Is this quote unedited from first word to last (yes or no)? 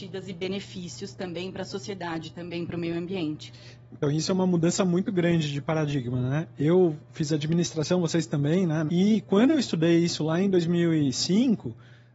no